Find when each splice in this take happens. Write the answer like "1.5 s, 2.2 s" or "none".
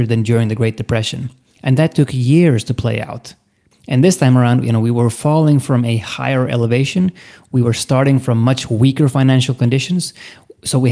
none